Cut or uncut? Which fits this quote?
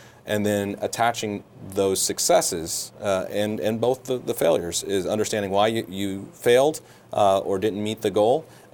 uncut